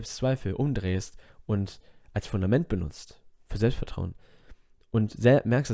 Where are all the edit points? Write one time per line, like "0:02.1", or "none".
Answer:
none